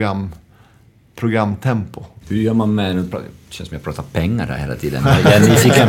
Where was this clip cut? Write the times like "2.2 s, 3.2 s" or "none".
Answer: 2.2 s

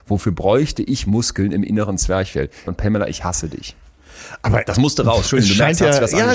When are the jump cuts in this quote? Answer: 2.7 s

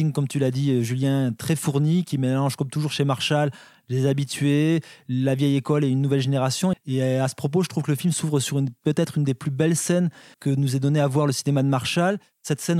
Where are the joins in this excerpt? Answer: 6.7 s, 10.3 s

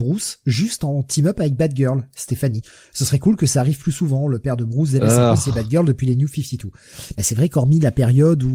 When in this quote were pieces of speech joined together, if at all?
none

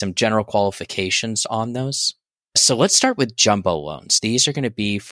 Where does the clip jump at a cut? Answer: 2.4 s

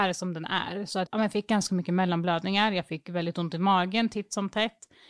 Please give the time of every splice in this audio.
1.1 s

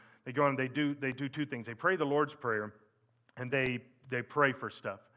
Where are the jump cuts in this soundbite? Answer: 3.5 s

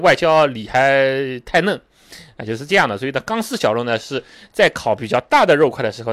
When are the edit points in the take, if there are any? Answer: none

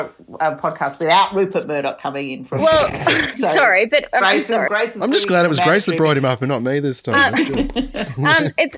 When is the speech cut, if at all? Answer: 4.7 s

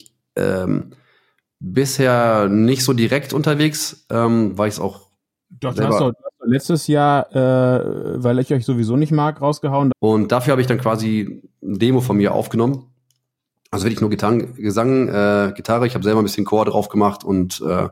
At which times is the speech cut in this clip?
9.9 s

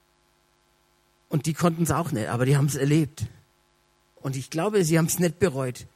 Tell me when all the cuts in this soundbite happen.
none

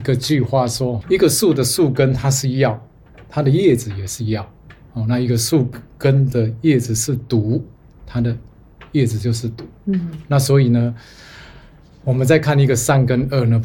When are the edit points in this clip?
1.0 s

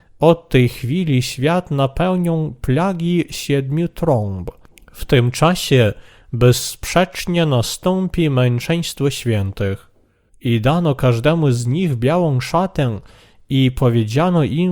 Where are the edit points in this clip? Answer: 10.3 s

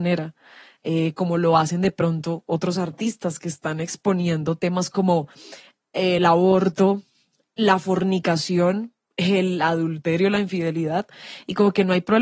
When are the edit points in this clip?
none

